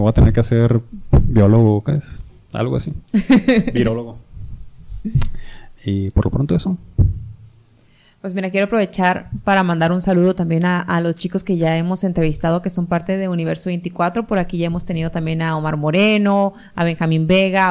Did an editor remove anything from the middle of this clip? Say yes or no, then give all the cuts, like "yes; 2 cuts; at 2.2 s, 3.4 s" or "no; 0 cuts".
yes; 1 cut; at 3.1 s